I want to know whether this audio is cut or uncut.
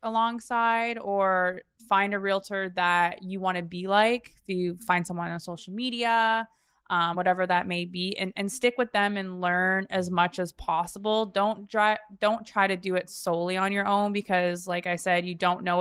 uncut